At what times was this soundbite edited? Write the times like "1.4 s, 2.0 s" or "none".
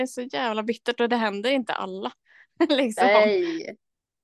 none